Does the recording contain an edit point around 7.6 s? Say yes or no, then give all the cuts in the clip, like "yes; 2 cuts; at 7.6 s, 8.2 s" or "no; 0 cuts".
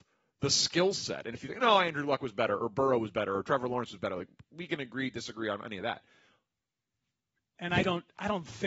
yes; 1 cut; at 7.6 s